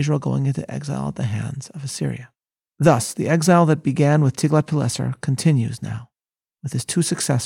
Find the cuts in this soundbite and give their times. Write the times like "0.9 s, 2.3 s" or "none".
2.6 s